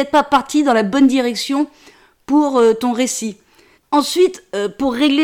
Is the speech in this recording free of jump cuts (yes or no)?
no